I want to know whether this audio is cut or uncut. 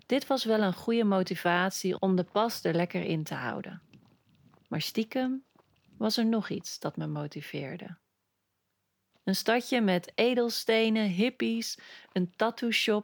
cut